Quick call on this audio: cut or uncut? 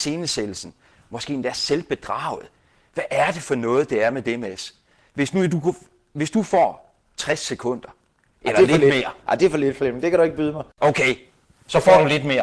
uncut